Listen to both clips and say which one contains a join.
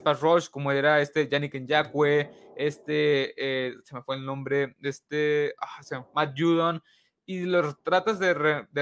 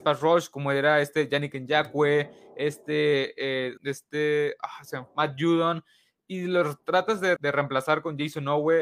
second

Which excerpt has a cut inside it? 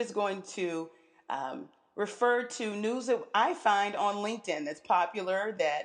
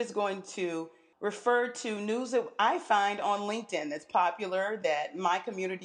second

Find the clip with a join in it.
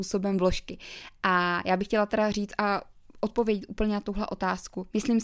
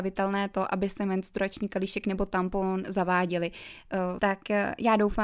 second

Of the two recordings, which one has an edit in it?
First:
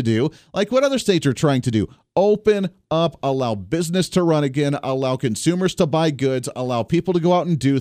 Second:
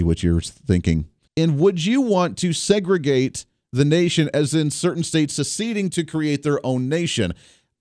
second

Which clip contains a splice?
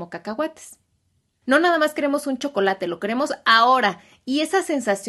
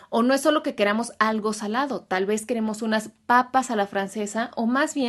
first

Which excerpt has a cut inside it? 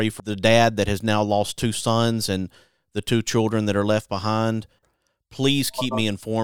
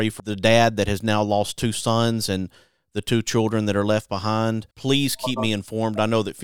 second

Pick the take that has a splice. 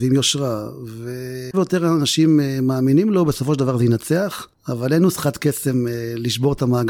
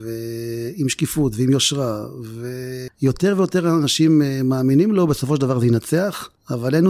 first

